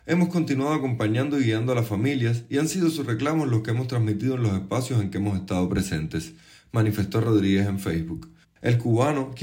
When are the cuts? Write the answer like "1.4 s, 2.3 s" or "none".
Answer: 8.4 s